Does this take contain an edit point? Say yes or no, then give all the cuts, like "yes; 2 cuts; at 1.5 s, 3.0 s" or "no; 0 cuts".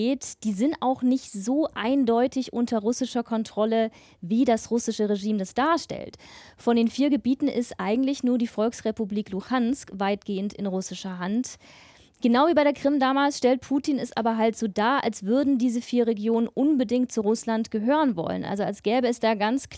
no; 0 cuts